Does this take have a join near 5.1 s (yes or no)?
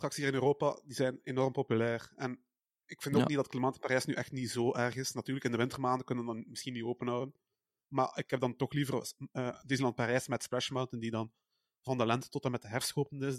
no